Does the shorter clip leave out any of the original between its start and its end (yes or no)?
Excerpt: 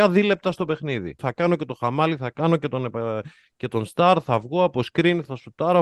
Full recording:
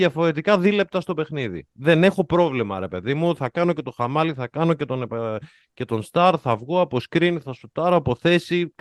yes